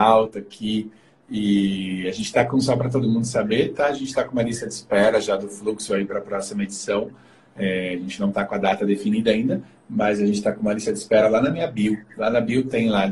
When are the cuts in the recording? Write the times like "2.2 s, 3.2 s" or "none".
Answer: none